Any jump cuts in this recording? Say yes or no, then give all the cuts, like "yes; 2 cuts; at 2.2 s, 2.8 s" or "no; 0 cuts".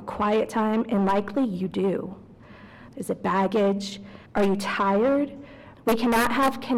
yes; 3 cuts; at 2.9 s, 4.3 s, 5.7 s